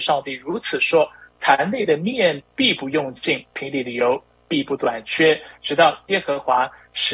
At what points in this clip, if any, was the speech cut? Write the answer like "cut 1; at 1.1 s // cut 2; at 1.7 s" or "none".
cut 1; at 2.4 s